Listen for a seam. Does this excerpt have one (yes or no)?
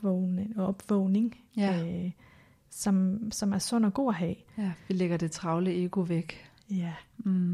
no